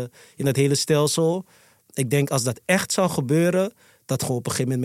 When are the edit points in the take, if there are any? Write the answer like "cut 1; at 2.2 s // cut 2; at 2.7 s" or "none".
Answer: none

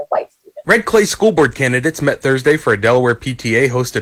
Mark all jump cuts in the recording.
none

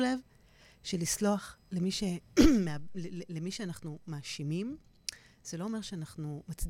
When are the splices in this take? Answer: none

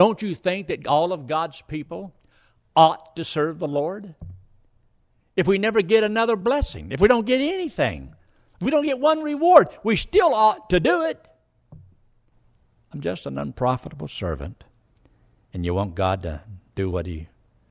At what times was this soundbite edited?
none

